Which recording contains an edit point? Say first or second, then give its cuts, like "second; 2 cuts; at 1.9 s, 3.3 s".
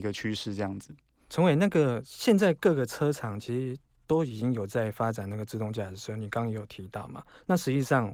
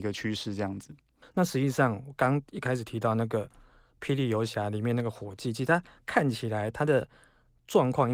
second; 1 cut; at 1.2 s